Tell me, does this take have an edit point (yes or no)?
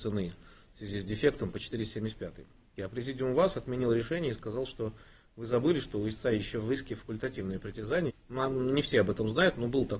yes